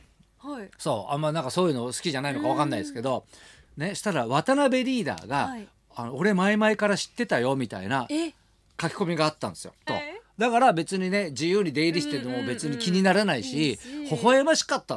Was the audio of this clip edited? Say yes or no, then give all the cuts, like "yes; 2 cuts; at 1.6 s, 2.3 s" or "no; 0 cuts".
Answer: yes; 1 cut; at 9.9 s